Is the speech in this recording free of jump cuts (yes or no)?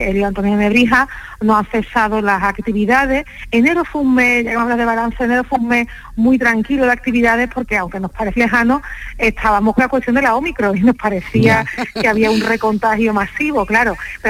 no